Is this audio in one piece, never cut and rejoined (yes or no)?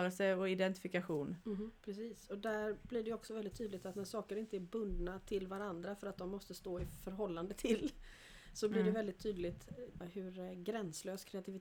no